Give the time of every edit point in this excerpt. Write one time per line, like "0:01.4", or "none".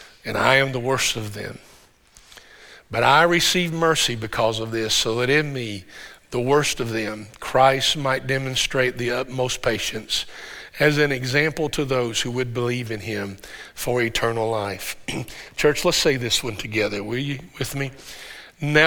none